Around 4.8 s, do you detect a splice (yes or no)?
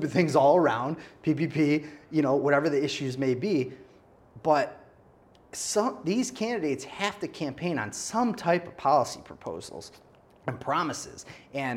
no